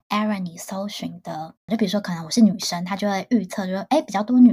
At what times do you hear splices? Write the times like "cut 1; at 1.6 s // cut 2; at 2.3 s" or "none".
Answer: cut 1; at 1.7 s